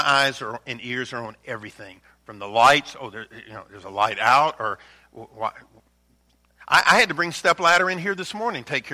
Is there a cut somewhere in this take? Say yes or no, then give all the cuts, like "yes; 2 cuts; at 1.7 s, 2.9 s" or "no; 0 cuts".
no; 0 cuts